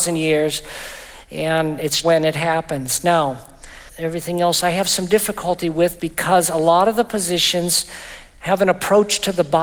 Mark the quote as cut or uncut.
cut